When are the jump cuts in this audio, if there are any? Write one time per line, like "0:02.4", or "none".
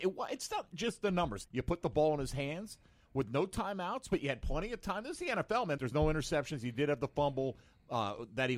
0:01.4
0:05.8

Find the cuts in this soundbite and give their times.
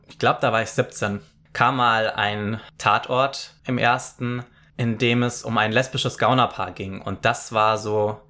none

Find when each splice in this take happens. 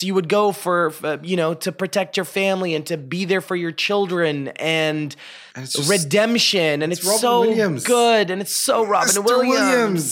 0:05.5

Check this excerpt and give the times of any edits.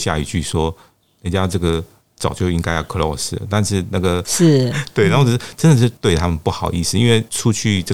0:04.2

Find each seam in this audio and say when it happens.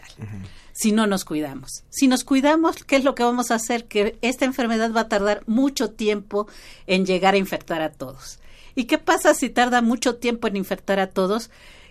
none

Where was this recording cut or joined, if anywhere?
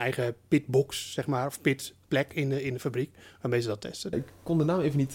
0:04.1

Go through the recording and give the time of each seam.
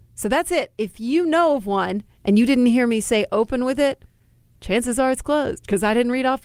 none

